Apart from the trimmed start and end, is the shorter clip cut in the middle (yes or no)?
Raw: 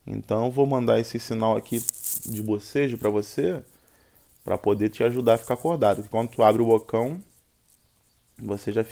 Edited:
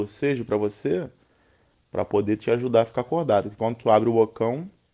no